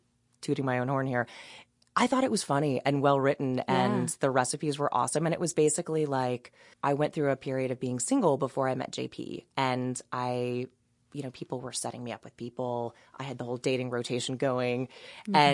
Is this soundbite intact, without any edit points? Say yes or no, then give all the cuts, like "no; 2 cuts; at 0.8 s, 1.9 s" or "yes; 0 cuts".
no; 1 cut; at 6.7 s